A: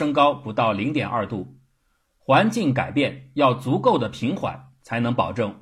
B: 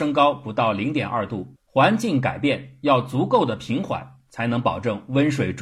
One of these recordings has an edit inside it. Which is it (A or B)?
B